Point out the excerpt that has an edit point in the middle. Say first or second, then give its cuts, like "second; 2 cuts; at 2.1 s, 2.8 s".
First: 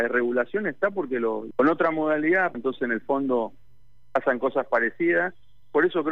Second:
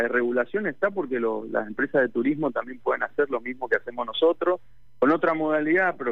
first; 2 cuts; at 1.5 s, 2.5 s